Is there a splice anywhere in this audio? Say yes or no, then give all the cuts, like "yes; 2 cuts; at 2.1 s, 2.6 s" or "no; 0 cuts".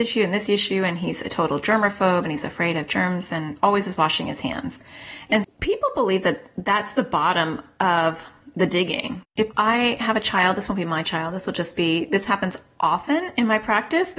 yes; 2 cuts; at 5.4 s, 9.2 s